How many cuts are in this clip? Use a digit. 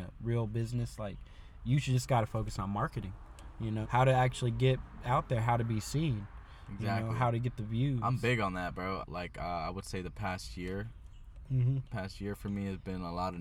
2